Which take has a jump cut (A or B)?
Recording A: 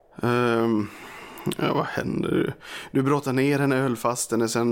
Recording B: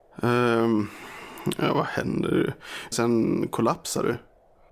B